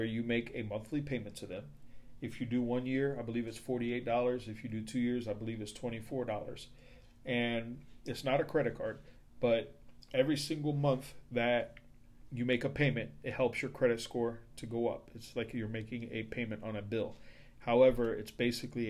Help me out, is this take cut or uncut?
uncut